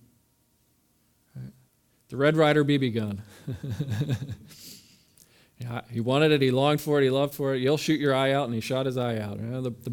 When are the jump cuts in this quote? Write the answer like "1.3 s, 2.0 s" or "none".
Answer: none